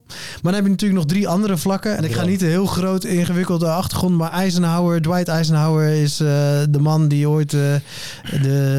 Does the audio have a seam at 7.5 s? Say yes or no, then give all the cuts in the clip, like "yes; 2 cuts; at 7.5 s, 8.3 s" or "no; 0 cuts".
no; 1 cut; at 2.0 s